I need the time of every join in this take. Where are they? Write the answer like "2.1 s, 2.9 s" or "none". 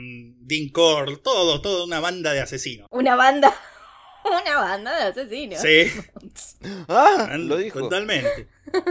none

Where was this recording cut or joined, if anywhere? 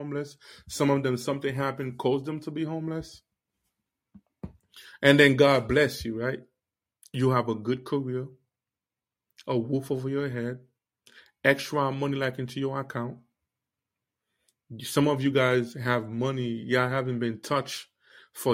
none

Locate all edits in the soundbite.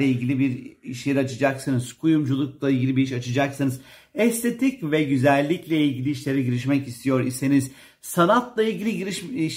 none

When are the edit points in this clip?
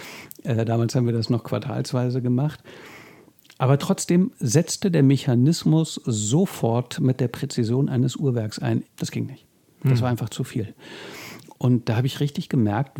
8.8 s, 11.5 s

